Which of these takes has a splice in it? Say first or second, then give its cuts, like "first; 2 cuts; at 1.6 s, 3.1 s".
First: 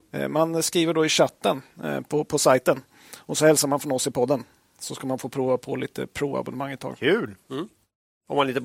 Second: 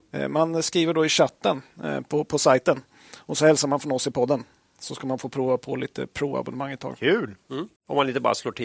second; 1 cut; at 7.8 s